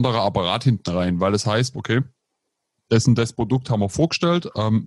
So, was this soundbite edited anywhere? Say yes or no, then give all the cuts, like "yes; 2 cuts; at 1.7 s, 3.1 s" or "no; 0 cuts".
yes; 1 cut; at 1.7 s